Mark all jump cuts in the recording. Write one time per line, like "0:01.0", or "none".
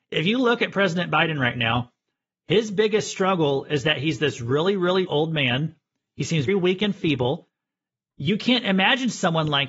0:05.0
0:06.5